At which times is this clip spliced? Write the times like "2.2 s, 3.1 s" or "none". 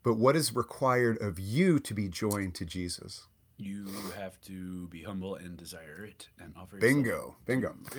none